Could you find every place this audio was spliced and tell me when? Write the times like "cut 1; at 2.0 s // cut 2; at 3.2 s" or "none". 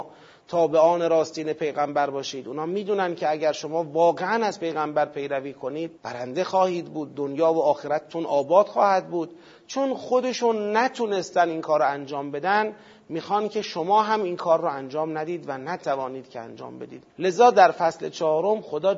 cut 1; at 6.0 s // cut 2; at 17.1 s